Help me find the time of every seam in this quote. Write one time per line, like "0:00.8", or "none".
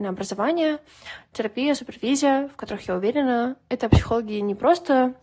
none

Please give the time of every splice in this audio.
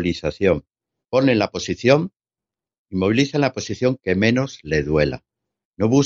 0:01.0

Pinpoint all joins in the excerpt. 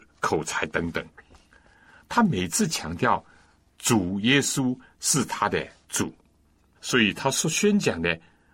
0:06.7

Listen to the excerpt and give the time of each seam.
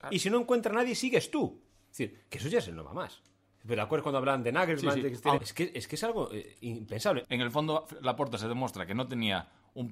0:05.4
0:07.2

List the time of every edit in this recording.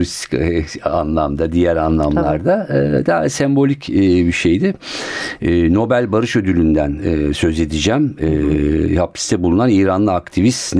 0:05.4

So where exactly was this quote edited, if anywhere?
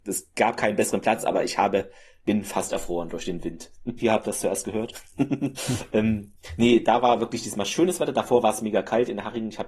0:04.0
0:05.6

